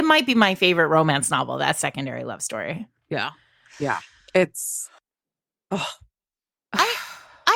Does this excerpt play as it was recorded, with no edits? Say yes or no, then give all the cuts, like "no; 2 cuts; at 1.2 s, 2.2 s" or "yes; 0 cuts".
yes; 0 cuts